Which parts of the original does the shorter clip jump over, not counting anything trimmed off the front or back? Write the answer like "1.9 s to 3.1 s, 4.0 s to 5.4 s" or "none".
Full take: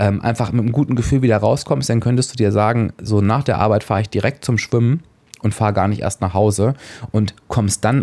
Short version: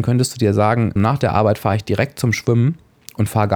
2.9 s to 3.2 s